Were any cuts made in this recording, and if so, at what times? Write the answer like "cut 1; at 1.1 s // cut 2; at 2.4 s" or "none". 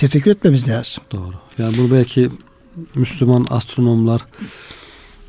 none